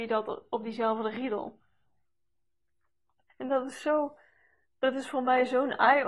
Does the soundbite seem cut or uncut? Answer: cut